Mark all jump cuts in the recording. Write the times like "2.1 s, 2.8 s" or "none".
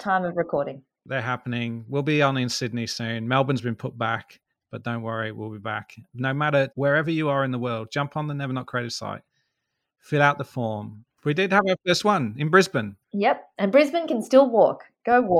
6.7 s, 11.1 s, 13.0 s